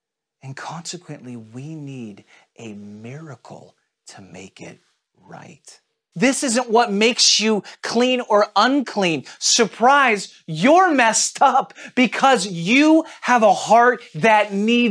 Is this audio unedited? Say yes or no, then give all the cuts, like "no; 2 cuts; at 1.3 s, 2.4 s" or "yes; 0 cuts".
no; 1 cut; at 6.1 s